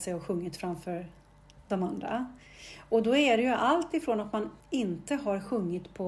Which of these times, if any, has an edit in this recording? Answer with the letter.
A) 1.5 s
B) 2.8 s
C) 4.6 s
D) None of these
C